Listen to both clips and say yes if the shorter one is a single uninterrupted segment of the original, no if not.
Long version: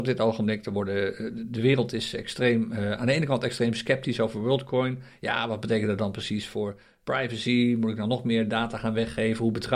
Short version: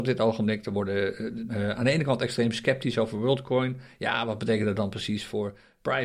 no